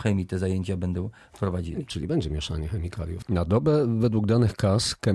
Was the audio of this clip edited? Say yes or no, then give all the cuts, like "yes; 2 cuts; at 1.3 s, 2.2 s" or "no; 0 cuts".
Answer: yes; 1 cut; at 3.2 s